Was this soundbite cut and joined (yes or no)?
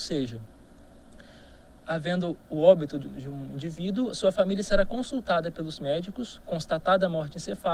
no